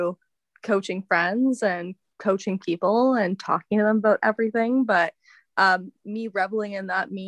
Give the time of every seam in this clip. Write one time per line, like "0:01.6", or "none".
none